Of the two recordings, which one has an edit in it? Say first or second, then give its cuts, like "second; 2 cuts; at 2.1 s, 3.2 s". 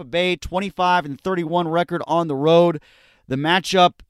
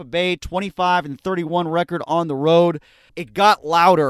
second; 1 cut; at 3.1 s